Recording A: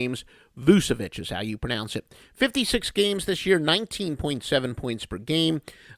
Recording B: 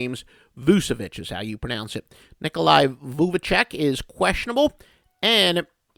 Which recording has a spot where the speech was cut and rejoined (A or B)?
B